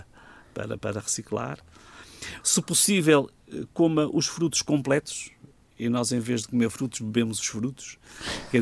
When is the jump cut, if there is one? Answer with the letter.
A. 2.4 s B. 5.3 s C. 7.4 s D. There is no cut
A